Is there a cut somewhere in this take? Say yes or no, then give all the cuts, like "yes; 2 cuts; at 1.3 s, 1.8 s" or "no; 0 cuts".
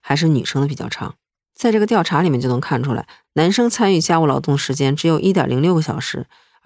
no; 0 cuts